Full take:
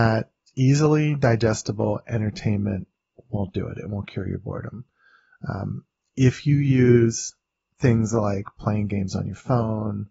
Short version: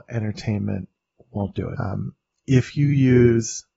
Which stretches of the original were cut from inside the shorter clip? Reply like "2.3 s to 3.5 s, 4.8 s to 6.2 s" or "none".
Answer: 3.7 s to 5.5 s